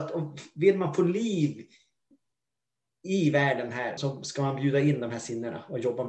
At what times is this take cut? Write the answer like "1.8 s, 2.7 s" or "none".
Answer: 4.0 s